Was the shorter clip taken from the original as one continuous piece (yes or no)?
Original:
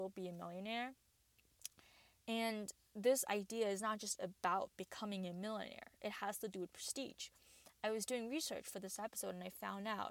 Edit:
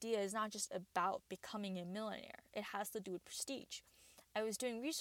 yes